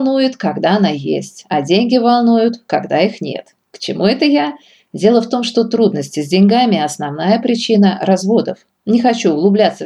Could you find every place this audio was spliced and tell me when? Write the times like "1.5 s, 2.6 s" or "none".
none